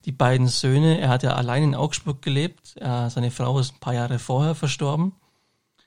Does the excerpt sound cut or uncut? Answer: uncut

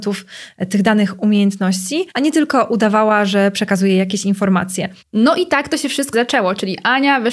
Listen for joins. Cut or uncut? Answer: cut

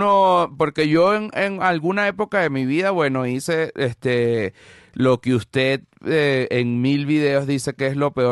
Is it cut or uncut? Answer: uncut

